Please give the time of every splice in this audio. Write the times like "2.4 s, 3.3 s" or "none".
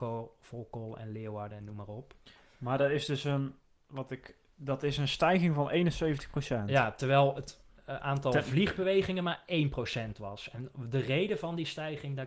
none